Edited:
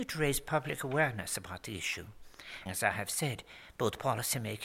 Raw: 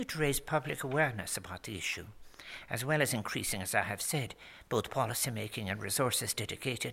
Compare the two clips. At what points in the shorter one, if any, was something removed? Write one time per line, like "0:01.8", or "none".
0:02.7